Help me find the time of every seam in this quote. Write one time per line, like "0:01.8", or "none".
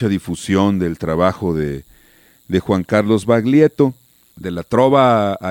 0:04.3